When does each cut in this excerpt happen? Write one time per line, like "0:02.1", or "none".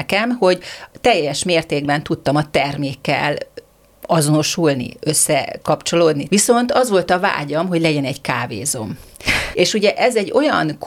0:06.3
0:09.5